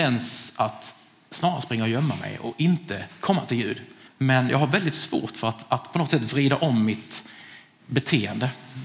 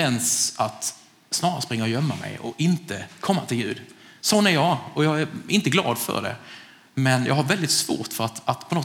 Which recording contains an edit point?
first; 1 cut; at 4.1 s

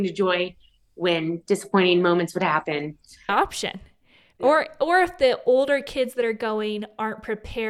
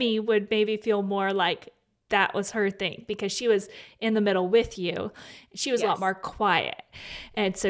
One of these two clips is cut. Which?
first; 1 cut; at 3.3 s

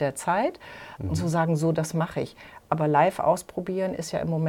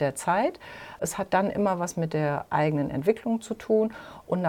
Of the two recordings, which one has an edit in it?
first; 1 cut; at 1.0 s

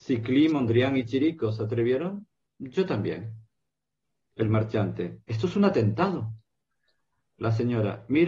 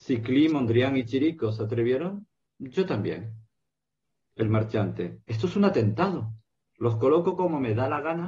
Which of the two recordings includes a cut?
second; 1 cut; at 6.6 s

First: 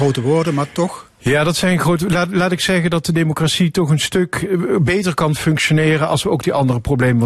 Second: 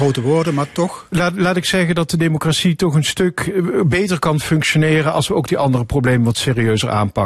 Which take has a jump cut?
second; 1 cut; at 1.1 s

